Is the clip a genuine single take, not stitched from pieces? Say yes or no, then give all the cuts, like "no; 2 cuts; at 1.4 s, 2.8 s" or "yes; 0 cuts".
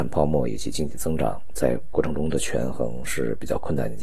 yes; 0 cuts